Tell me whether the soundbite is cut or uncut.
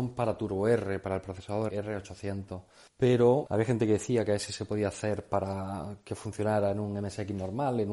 uncut